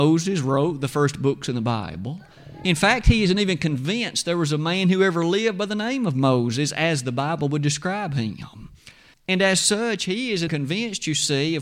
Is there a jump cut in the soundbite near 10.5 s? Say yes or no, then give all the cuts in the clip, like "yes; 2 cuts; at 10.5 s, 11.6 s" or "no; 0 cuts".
yes; 2 cuts; at 9.1 s, 10.5 s